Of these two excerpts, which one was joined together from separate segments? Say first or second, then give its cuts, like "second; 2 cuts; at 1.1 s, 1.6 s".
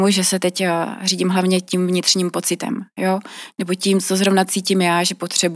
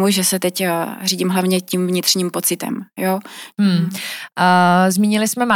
second; 1 cut; at 3.5 s